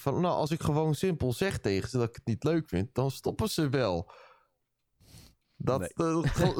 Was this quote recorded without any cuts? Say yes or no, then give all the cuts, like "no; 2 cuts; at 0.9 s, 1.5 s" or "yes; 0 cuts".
yes; 0 cuts